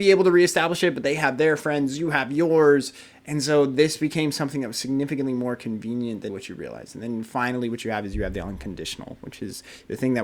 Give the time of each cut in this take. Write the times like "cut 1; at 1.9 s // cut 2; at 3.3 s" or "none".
cut 1; at 6.3 s